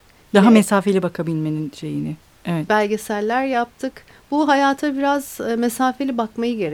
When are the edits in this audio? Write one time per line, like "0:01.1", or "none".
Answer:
0:02.7